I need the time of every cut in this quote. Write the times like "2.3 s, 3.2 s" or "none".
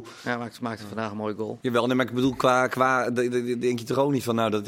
1.6 s